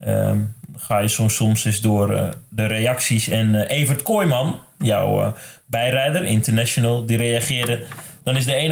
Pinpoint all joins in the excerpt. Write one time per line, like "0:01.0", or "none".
none